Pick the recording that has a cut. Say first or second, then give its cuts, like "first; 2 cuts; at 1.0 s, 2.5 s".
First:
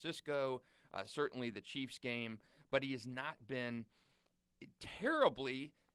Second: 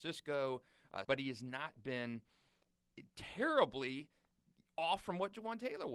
second; 1 cut; at 1.0 s